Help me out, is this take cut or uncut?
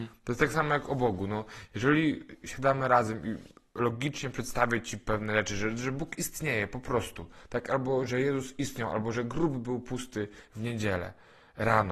uncut